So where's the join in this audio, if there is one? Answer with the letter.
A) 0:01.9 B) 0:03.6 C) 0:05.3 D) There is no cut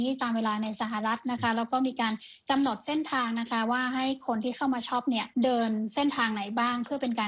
C